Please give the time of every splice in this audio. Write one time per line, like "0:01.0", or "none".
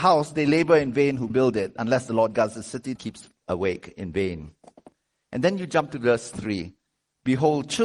0:03.0